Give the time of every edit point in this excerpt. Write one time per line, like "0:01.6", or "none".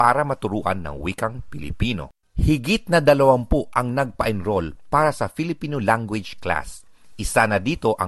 0:02.2